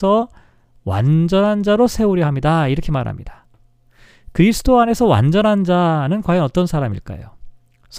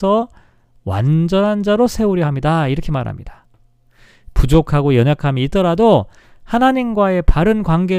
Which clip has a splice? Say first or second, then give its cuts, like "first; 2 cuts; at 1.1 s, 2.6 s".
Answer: second; 1 cut; at 4.3 s